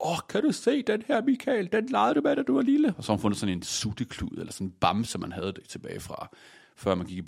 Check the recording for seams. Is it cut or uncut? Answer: uncut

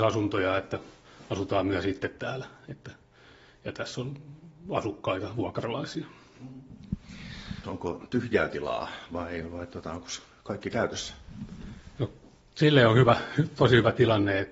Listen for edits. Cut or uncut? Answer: cut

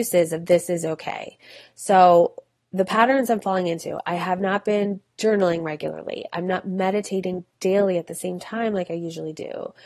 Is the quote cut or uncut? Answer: uncut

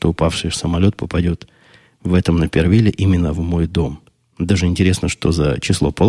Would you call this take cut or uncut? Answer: uncut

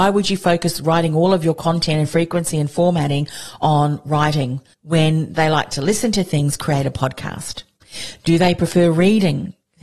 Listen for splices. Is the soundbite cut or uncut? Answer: uncut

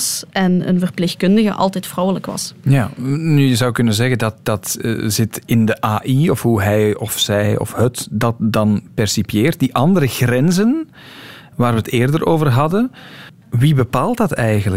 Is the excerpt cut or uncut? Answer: uncut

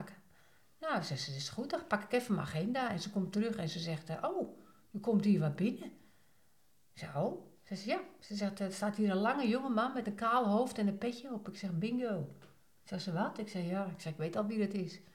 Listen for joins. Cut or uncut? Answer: uncut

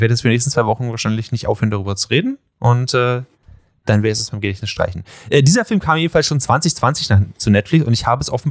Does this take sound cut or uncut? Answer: uncut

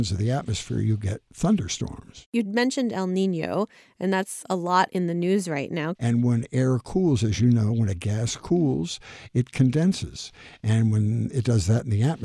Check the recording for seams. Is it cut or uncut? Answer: cut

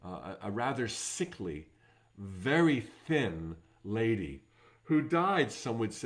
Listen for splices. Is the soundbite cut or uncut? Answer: uncut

